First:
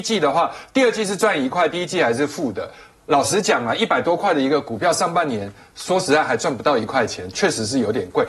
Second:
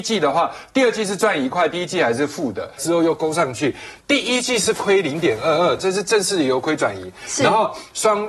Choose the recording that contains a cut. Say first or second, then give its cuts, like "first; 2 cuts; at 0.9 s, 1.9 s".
second; 3 cuts; at 2.8 s, 4.0 s, 5.8 s